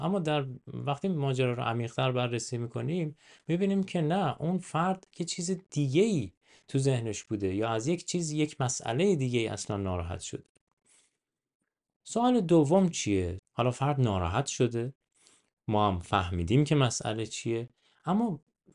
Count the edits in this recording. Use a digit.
1